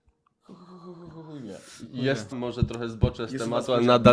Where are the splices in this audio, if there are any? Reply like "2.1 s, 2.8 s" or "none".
2.3 s